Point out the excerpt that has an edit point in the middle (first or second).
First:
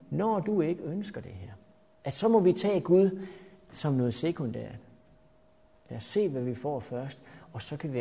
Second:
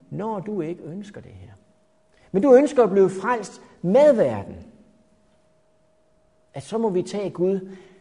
first